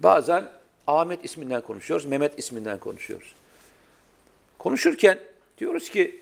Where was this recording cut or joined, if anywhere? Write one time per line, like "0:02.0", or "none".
none